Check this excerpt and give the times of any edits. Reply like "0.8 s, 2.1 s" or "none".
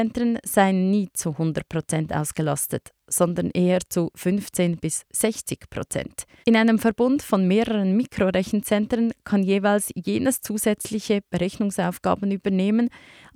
6.4 s